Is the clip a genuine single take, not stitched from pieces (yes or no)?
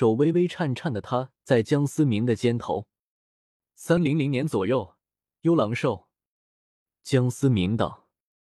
no